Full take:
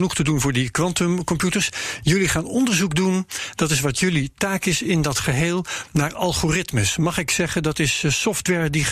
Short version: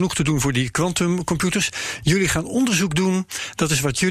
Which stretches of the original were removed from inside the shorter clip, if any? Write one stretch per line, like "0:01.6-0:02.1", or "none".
none